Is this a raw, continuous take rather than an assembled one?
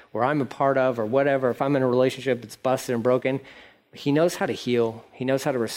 yes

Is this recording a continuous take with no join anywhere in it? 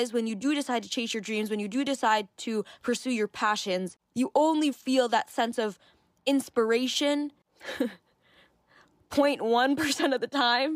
no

